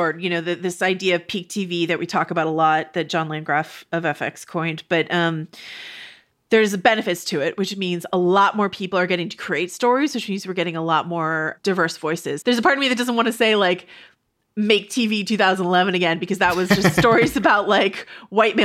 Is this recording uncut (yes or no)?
no